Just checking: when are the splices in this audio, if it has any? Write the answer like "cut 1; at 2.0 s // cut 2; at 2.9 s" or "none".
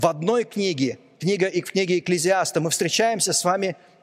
none

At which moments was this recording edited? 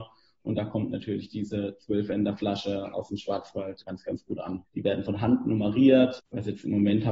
cut 1; at 4.7 s

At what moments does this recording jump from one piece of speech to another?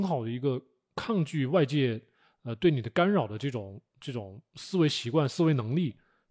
none

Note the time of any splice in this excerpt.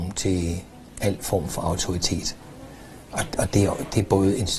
none

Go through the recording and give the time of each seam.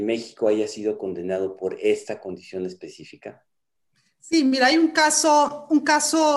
none

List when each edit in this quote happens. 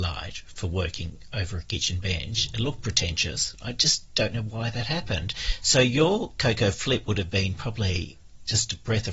none

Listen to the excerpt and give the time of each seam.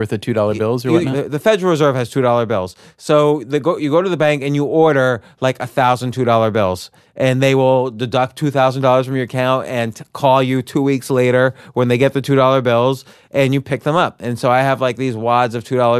none

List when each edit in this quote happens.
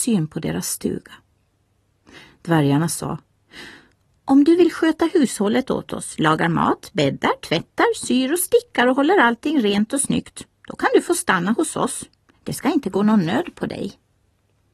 none

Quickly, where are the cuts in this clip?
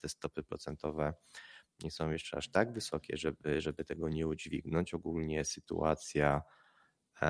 none

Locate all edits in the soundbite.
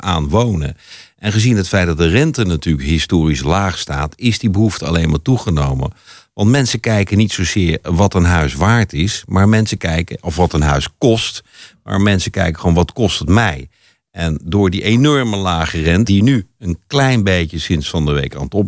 cut 1; at 16.1 s

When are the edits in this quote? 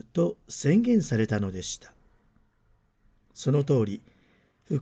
none

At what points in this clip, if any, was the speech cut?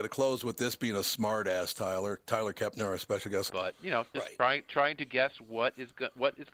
cut 1; at 3.5 s

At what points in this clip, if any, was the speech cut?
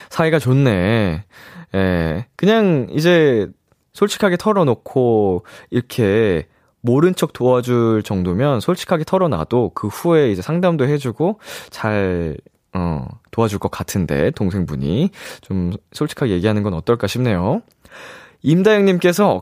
none

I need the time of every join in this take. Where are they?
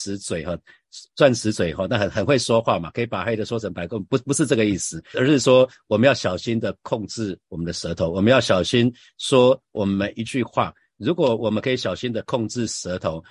cut 1; at 5.1 s

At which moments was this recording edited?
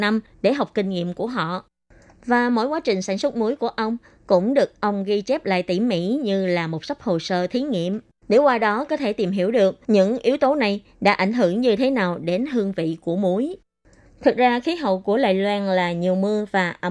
cut 1; at 8.2 s // cut 2; at 9.8 s // cut 3; at 14.1 s

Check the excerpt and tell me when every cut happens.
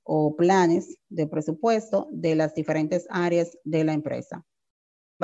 none

